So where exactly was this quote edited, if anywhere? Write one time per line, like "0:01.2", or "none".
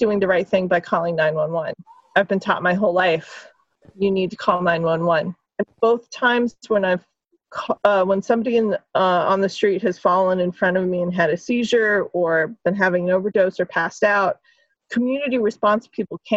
0:05.5